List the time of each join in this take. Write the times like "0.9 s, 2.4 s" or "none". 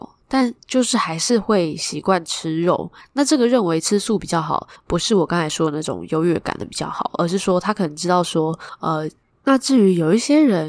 9.3 s